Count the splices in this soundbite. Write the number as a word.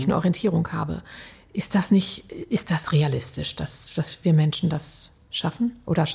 zero